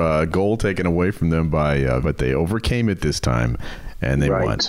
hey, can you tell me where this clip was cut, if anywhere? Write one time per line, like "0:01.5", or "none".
0:02.0